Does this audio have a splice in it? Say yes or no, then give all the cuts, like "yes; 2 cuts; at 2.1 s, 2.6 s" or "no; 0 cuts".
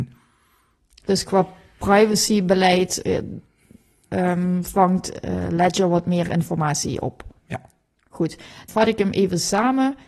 yes; 2 cuts; at 7.4 s, 8.7 s